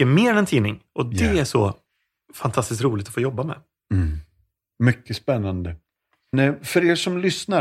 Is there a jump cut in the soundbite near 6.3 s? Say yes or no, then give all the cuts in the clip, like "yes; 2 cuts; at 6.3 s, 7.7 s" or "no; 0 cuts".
yes; 1 cut; at 6.3 s